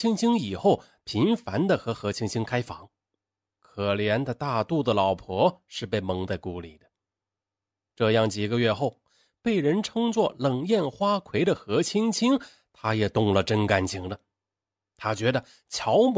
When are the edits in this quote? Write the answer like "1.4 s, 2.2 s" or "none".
1.0 s